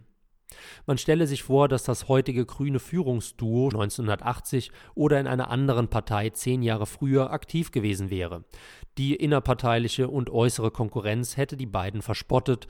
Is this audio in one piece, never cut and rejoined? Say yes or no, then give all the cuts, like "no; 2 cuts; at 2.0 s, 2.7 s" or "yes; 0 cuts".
no; 1 cut; at 3.7 s